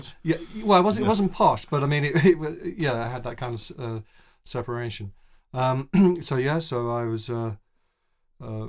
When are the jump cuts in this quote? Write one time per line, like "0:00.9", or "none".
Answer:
none